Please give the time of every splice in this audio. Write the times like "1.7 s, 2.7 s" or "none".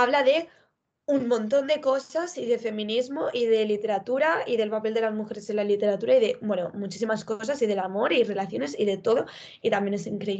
none